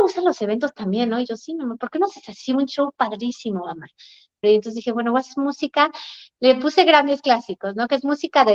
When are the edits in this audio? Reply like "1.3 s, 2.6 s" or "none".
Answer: 4.4 s